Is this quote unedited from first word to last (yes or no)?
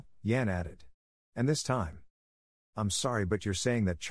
yes